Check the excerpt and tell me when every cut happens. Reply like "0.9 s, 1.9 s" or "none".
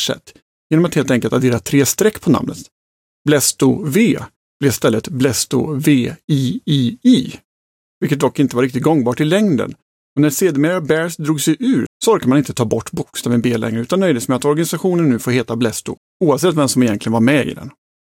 11.9 s